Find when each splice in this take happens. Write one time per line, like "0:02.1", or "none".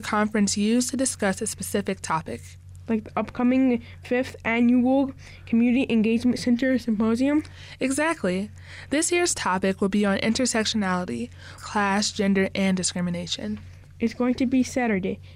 0:11.6